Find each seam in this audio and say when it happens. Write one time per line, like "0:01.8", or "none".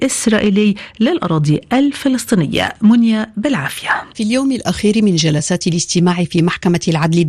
0:04.1

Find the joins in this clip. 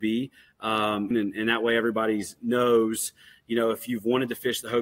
0:01.1

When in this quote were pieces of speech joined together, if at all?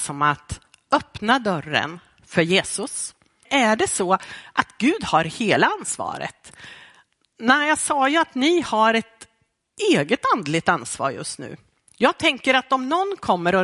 0:03.5

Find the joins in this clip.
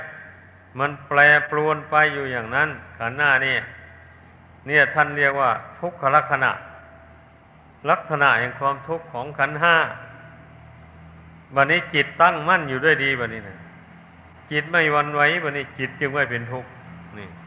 none

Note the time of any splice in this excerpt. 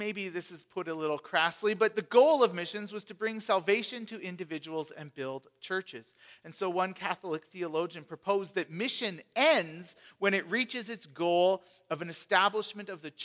none

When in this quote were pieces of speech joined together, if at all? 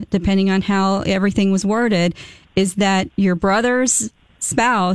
0:03.1

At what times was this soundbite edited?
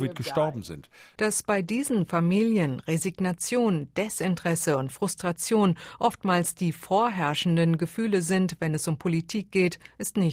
0:01.2

